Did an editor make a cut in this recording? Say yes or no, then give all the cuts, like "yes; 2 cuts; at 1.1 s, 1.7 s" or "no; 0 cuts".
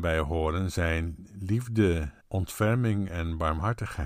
yes; 1 cut; at 2.2 s